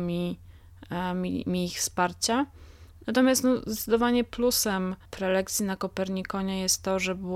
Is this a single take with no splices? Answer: no; 1 cut; at 5.1 s

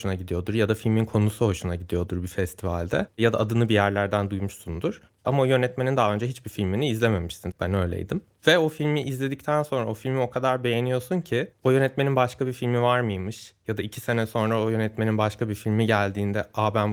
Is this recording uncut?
no; 1 cut; at 7.5 s

